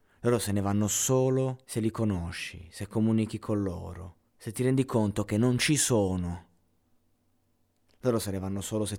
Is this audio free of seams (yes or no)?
no